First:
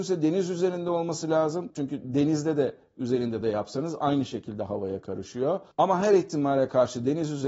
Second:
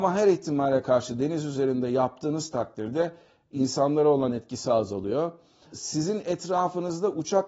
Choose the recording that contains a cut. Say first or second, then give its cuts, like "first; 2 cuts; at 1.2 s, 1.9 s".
first; 1 cut; at 1.7 s